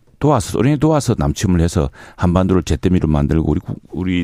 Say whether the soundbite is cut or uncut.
uncut